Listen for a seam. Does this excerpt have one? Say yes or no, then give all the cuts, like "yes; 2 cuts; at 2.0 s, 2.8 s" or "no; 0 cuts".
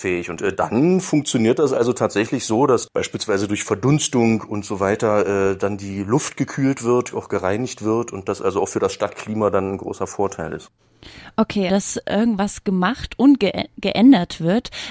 yes; 1 cut; at 11.7 s